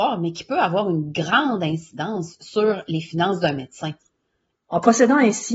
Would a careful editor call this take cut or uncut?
cut